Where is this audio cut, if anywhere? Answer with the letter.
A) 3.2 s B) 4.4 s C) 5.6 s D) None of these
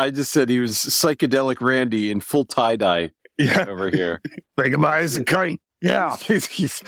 D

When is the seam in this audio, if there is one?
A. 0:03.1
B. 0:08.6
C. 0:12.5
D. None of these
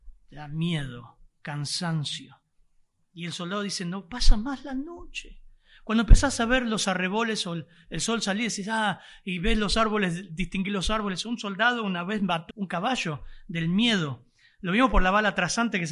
C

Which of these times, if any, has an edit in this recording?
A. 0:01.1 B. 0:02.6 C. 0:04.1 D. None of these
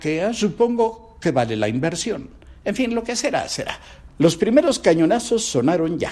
C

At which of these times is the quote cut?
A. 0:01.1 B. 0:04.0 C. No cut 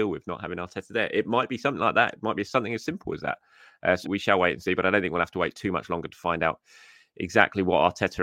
B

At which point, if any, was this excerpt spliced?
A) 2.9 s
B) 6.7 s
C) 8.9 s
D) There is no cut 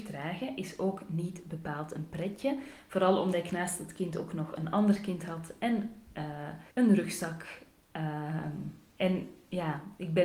B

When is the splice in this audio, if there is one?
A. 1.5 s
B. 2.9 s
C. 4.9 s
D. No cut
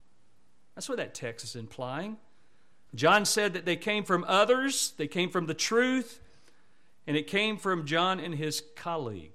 B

